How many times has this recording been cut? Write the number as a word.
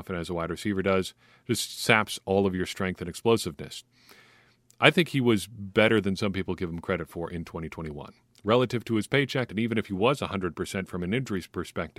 one